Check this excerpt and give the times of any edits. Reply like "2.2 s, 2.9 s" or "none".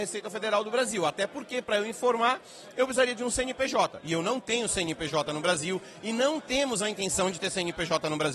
none